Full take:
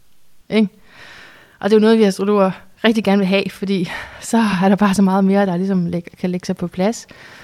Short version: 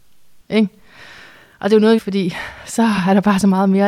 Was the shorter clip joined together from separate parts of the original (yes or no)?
yes